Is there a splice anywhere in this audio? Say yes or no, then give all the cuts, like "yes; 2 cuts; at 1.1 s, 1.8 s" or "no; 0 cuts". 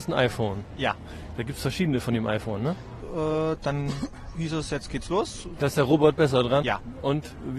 yes; 3 cuts; at 3.0 s, 5.6 s, 6.6 s